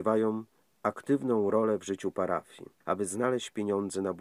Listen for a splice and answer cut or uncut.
cut